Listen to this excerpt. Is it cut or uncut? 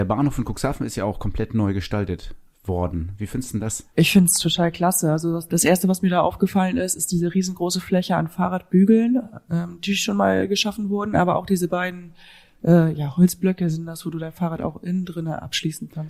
cut